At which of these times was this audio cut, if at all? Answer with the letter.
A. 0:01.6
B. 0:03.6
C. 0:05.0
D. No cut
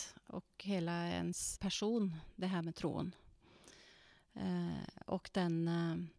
A